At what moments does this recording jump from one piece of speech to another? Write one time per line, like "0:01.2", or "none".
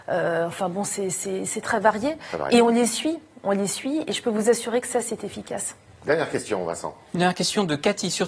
none